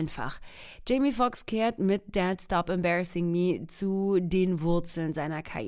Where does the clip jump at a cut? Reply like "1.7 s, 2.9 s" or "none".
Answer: none